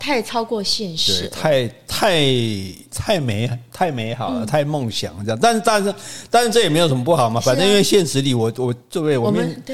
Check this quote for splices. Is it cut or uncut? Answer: uncut